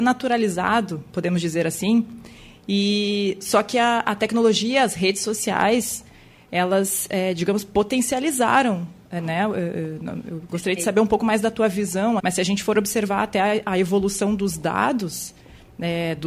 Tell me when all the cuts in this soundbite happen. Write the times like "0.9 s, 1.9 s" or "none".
12.2 s